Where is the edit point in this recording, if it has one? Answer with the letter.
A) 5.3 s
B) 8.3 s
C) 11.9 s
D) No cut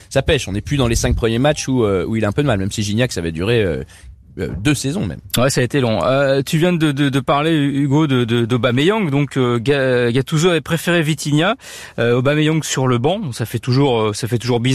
D